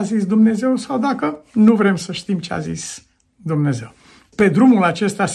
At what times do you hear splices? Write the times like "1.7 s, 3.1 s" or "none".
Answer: 4.3 s